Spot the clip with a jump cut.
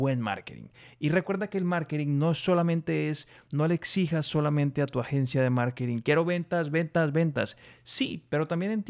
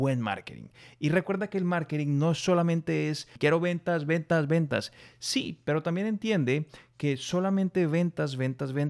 second; 1 cut; at 3.4 s

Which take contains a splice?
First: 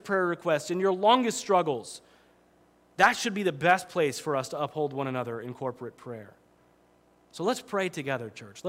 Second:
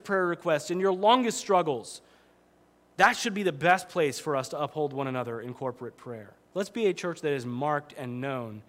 second; 1 cut; at 6.5 s

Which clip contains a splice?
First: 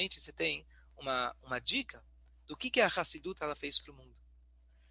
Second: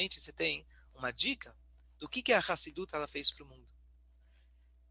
second; 1 cut; at 0.9 s

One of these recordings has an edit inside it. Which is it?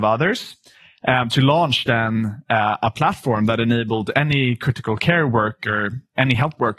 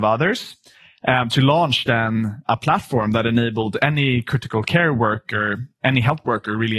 second; 1 cut; at 2.5 s

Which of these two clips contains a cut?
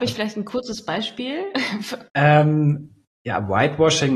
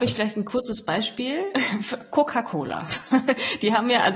first; 1 cut; at 2.1 s

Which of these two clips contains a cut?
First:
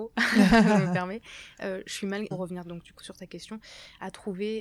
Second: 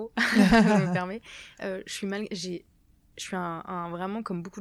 first; 1 cut; at 2.3 s

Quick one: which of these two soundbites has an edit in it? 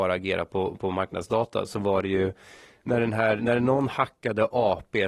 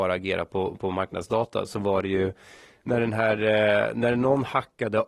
first; 1 cut; at 3.4 s

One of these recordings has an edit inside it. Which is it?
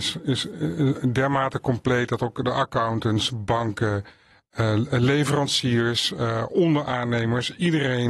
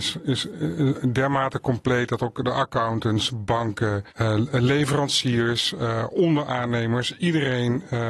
second; 1 cut; at 4.1 s

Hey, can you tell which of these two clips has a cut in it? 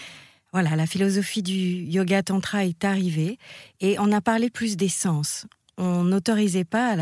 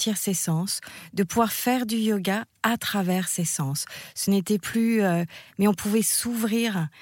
second; 1 cut; at 5.5 s

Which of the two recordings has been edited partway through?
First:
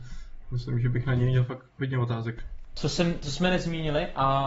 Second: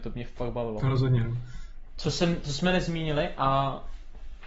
second; 1 cut; at 1.9 s

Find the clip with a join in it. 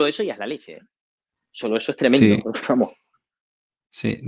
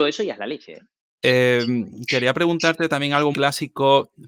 second; 2 cuts; at 1.2 s, 3.3 s

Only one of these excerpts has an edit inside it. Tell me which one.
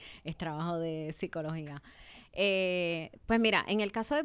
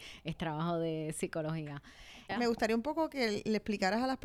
second; 1 cut; at 2.3 s

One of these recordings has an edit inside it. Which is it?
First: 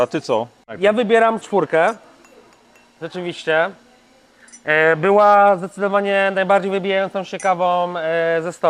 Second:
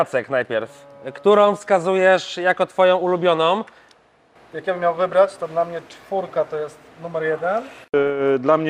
first; 1 cut; at 1.4 s

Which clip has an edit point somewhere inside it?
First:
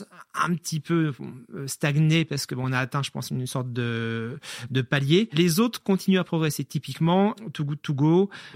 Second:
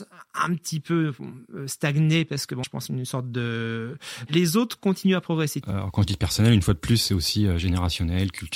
second; 3 cuts; at 2.6 s, 4.3 s, 5.6 s

